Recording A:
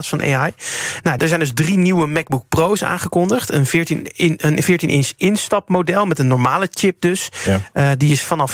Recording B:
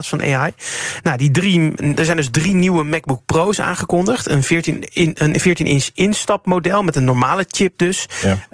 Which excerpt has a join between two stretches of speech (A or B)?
A